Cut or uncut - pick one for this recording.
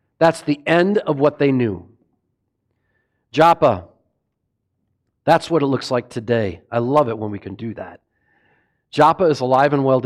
uncut